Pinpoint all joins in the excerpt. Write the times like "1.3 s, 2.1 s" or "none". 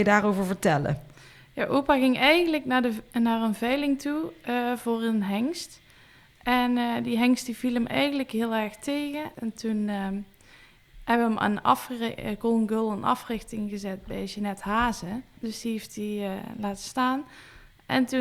9.3 s, 15.4 s